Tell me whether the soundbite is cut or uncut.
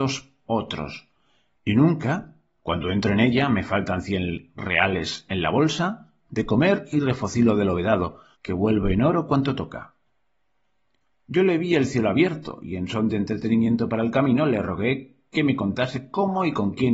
cut